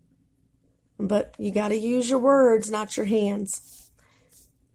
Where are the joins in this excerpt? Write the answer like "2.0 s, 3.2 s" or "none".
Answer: none